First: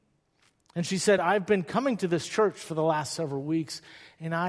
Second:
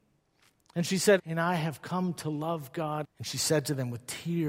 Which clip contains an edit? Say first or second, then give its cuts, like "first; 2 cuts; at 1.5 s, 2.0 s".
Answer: second; 2 cuts; at 1.2 s, 3.0 s